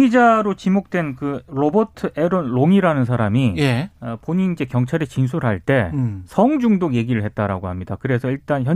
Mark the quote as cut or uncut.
uncut